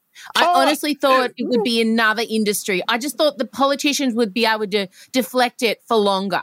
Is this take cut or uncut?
uncut